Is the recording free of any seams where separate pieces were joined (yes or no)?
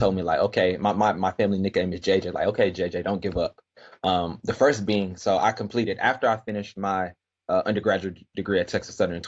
yes